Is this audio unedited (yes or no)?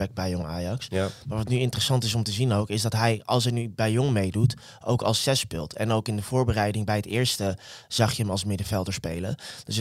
yes